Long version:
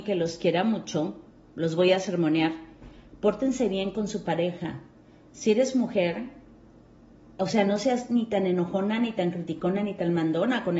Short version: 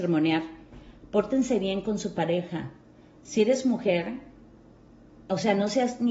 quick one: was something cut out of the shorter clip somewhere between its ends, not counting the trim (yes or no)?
no